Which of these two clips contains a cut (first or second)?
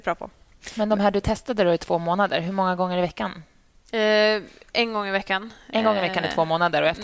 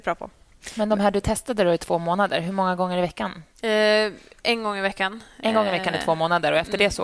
second